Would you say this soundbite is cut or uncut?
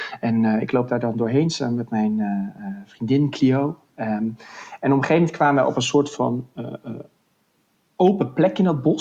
uncut